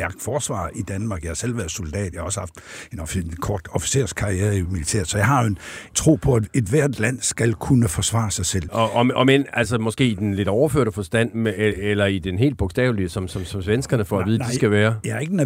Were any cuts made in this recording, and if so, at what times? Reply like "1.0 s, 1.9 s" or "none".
5.9 s, 8.7 s